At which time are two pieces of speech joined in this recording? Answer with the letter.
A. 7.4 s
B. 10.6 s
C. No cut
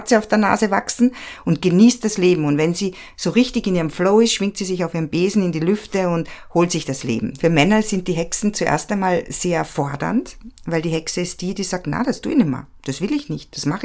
A